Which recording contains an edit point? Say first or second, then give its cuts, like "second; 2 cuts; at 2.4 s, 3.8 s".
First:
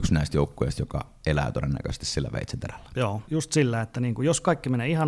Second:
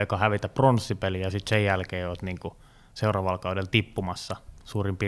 first; 1 cut; at 3.2 s